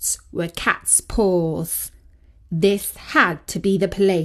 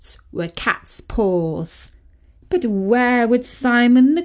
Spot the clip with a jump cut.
second; 1 cut; at 2.4 s

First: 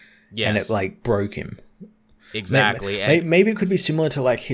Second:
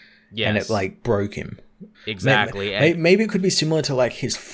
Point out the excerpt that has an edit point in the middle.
second; 1 cut; at 1.9 s

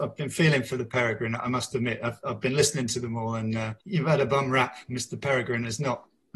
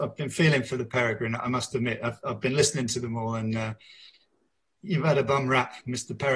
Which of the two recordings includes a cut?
first; 1 cut; at 3.8 s

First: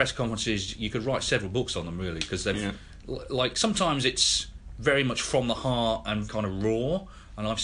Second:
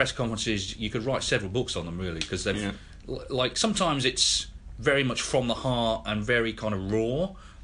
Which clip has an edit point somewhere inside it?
first; 1 cut; at 6.3 s

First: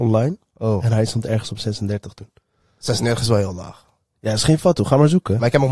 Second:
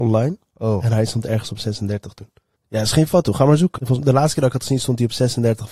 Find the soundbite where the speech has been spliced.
second; 2 cuts; at 2.6 s, 3.8 s

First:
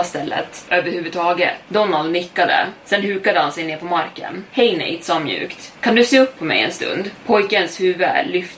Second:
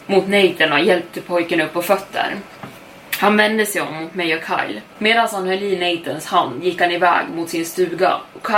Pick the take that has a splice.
second; 1 cut; at 4.9 s

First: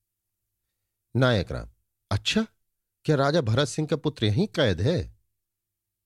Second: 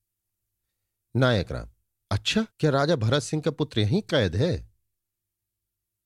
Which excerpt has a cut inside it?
second; 1 cut; at 2.5 s

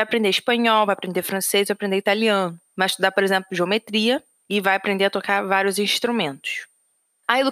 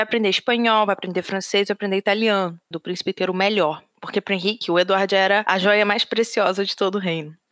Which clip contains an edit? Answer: second; 1 cut; at 2.7 s

